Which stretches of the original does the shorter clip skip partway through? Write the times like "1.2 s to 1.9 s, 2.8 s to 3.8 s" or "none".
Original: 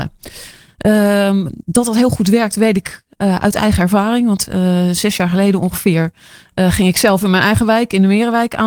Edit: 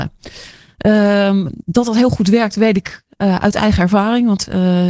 none